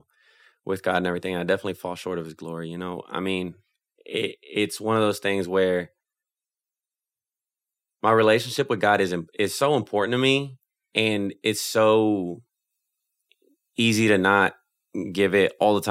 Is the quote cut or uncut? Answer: uncut